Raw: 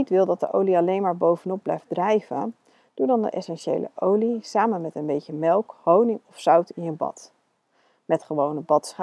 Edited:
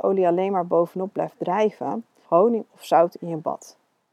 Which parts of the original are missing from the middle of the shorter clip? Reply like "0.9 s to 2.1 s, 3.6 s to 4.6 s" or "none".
2.8 s to 5.8 s